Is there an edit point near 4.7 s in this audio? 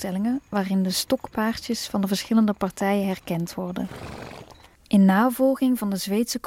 yes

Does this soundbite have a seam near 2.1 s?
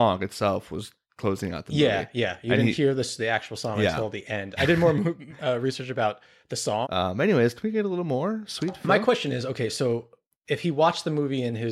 no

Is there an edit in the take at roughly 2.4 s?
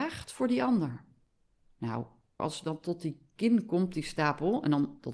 yes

